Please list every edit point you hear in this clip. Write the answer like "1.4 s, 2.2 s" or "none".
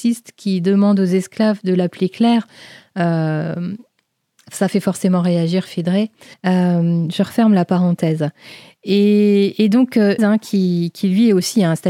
6.3 s, 10.2 s

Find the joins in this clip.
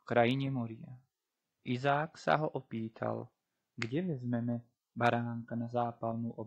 1.6 s

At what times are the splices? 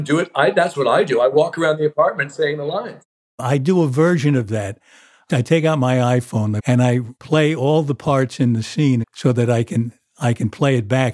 6.6 s, 9.0 s

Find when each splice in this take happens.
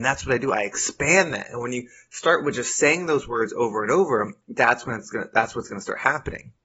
none

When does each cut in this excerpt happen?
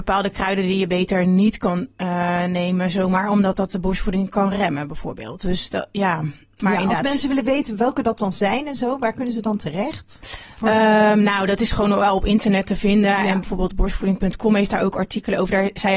none

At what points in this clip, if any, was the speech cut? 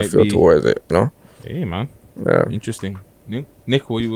none

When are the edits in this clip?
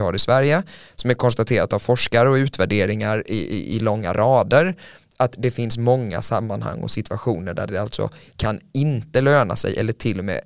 none

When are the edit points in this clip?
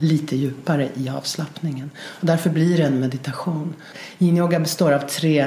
none

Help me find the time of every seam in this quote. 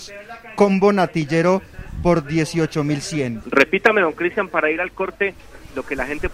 3.4 s

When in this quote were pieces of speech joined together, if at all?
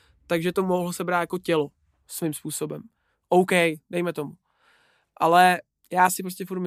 none

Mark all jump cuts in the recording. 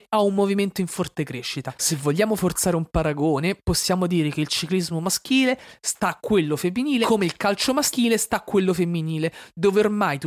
none

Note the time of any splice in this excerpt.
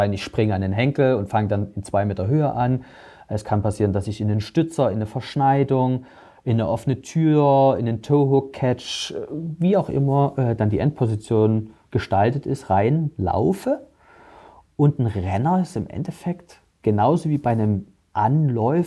none

